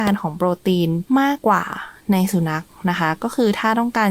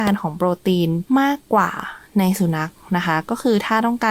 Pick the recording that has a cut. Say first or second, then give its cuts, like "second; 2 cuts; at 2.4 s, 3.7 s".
first; 1 cut; at 1.4 s